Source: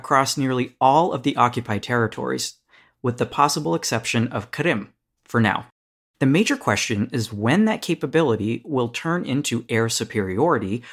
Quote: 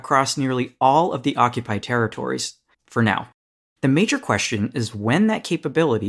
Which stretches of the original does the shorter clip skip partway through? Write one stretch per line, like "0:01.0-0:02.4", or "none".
0:02.7-0:05.1